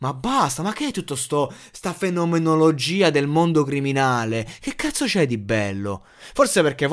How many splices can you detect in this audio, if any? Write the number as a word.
zero